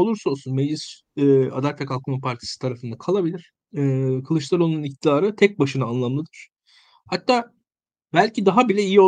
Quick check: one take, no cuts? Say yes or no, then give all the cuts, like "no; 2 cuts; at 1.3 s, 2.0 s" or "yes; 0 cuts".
yes; 0 cuts